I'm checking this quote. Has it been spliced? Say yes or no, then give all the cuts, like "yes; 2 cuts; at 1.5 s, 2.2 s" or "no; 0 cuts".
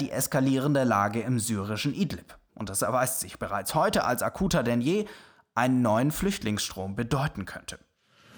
yes; 1 cut; at 2.5 s